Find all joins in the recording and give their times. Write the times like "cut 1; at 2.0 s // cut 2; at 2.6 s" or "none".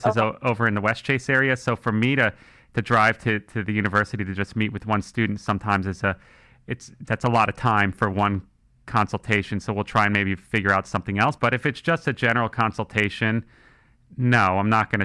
cut 1; at 11.4 s